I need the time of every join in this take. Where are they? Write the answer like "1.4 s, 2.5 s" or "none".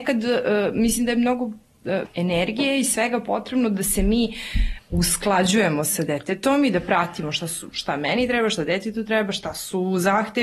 2.0 s, 4.8 s